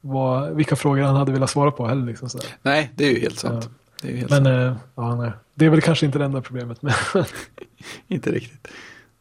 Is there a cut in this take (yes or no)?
yes